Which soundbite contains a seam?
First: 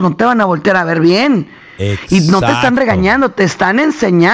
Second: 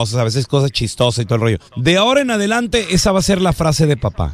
second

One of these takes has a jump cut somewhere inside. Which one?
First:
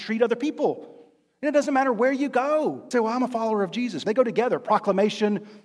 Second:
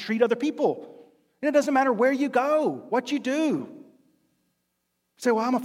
first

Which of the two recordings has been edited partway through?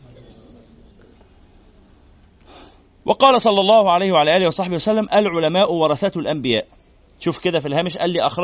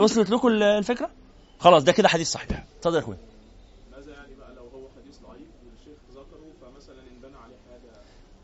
second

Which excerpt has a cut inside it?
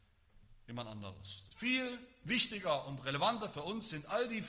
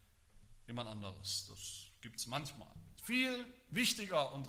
first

